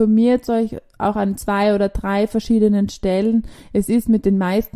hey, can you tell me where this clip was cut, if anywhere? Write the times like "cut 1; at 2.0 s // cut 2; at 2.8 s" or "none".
none